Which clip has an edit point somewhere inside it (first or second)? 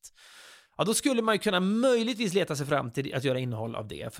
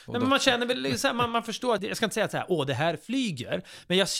second